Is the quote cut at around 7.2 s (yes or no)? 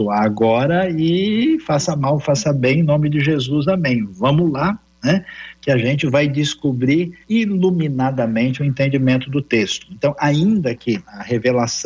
yes